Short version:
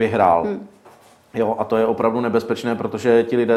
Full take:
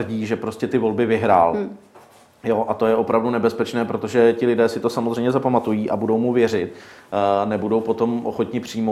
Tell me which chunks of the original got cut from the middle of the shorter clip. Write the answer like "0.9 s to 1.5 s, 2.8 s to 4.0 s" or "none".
none

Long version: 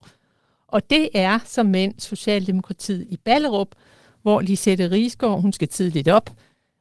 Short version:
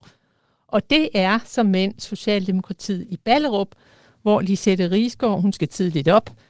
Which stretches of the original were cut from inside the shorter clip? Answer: none

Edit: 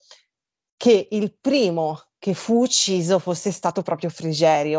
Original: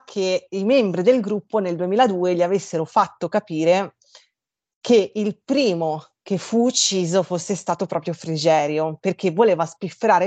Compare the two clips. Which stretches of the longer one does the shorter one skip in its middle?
none

